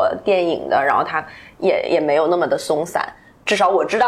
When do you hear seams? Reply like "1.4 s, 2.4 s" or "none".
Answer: none